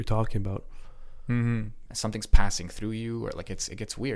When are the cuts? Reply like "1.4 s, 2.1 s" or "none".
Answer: 1.9 s